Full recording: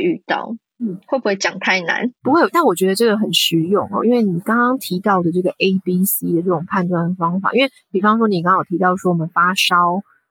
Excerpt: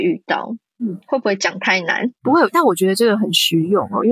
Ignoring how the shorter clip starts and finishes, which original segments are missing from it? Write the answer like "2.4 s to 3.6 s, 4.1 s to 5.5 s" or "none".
none